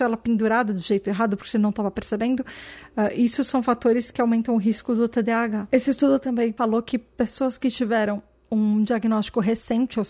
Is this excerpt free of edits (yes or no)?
yes